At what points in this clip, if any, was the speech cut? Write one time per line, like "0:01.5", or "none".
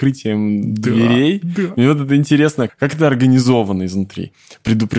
0:02.7

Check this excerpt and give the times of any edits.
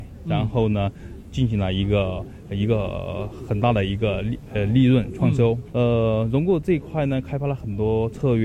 0:05.7

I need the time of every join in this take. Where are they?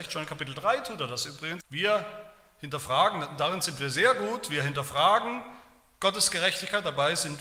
0:01.6

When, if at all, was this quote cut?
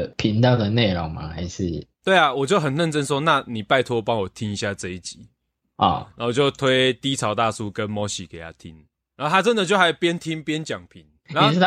none

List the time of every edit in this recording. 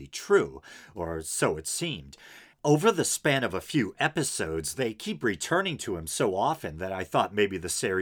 0:02.5

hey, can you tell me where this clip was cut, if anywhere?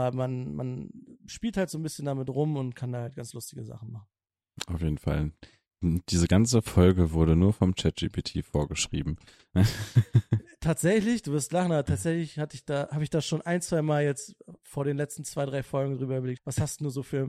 0:16.4

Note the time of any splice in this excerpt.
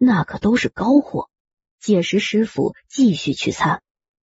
0:01.6

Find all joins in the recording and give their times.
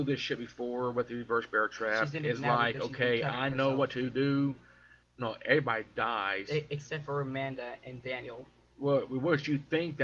0:05.0

